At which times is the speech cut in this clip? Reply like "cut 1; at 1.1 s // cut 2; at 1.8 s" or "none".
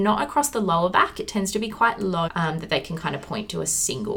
cut 1; at 2.3 s